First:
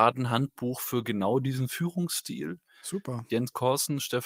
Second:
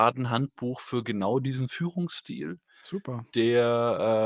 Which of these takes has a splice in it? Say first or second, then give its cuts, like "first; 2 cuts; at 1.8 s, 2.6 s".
first; 1 cut; at 3.3 s